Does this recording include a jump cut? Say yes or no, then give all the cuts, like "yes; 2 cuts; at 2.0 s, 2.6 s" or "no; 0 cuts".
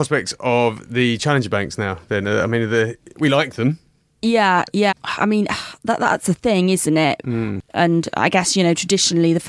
yes; 2 cuts; at 4.9 s, 7.2 s